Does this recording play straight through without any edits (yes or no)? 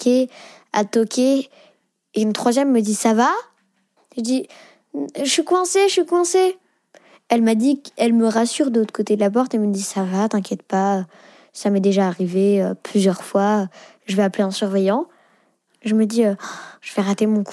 yes